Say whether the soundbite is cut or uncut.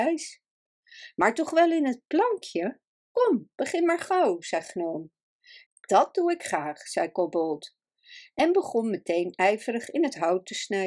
cut